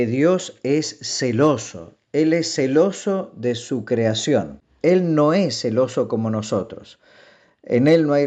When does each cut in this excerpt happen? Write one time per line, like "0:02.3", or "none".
0:04.8